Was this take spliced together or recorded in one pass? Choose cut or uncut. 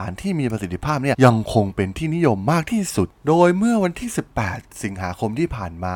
cut